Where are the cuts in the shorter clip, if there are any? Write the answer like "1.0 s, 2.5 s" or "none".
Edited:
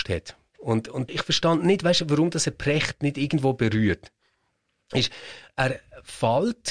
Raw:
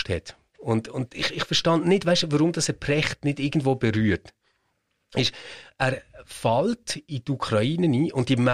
1.1 s